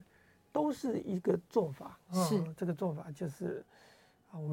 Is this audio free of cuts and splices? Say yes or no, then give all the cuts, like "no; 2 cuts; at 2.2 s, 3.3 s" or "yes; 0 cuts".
yes; 0 cuts